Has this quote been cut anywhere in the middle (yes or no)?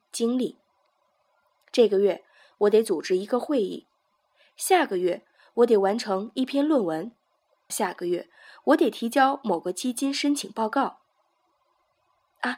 yes